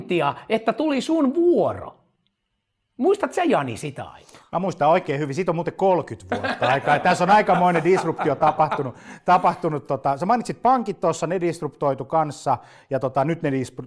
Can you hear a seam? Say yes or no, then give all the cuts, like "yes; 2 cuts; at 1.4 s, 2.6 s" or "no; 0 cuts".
no; 0 cuts